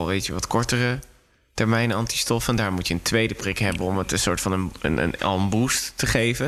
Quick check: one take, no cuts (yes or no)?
yes